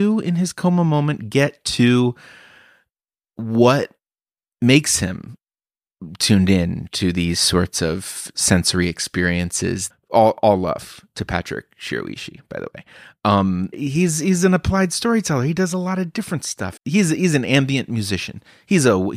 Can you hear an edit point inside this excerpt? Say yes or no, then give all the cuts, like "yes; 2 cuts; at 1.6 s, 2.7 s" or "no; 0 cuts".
yes; 3 cuts; at 9.9 s, 13.7 s, 16.8 s